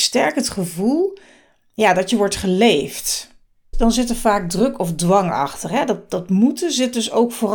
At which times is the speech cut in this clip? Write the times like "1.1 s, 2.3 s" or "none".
3.7 s